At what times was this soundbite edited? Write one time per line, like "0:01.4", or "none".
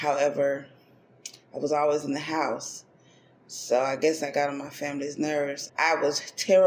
0:05.7